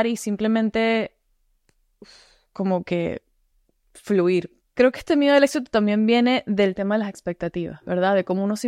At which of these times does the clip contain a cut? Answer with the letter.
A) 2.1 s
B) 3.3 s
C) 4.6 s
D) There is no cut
C